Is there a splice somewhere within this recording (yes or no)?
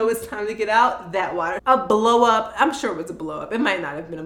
yes